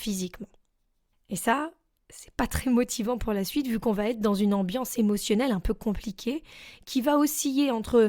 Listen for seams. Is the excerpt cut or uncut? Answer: cut